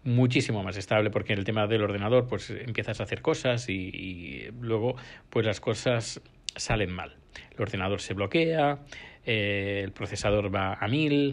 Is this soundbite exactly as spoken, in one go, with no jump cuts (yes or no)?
yes